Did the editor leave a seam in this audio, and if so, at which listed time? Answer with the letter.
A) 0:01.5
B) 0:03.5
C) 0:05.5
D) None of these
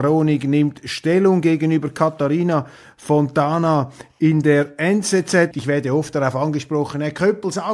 C